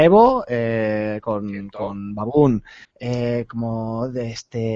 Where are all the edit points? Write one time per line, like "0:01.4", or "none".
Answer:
0:02.8